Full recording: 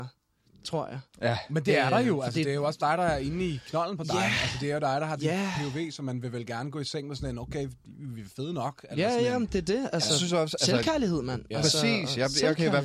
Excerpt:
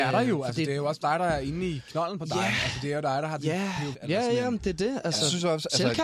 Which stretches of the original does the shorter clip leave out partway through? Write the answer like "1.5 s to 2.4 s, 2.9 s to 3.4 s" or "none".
5.7 s to 8.8 s